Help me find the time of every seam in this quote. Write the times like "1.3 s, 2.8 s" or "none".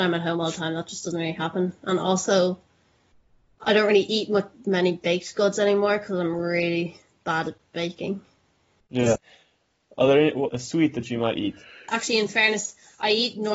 9.2 s, 10.5 s, 11.9 s

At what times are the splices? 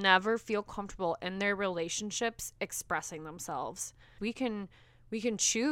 4.2 s

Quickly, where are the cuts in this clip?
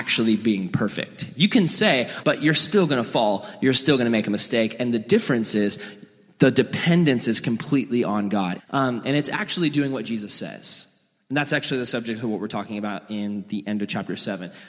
2.2 s, 8.6 s

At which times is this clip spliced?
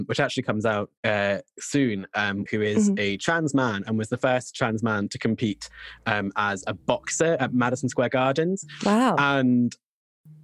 1.0 s, 2.5 s

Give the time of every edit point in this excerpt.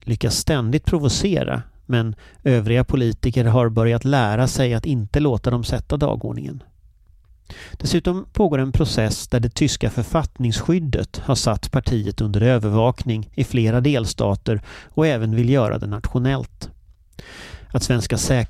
none

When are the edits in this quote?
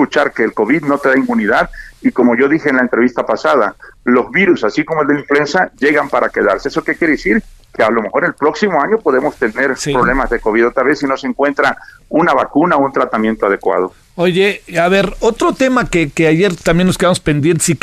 none

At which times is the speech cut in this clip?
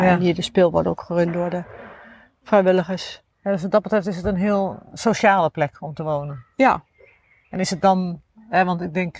3.3 s

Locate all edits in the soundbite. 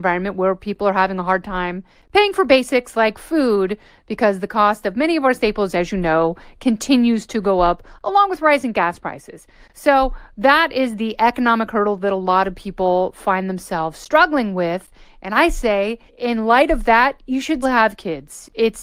16.1 s, 17.6 s

